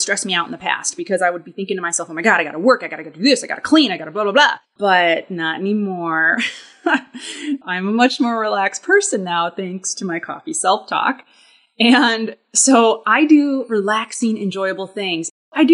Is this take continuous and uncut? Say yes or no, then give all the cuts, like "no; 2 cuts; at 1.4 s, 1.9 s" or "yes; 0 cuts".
no; 1 cut; at 4.7 s